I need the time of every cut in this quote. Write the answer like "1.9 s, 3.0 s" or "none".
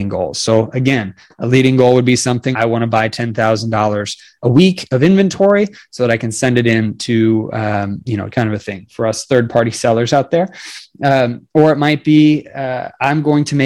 2.5 s, 8.3 s